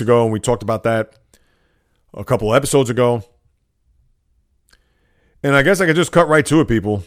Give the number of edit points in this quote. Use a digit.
0